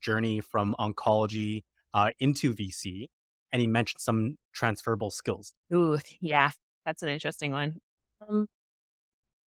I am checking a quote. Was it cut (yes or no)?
yes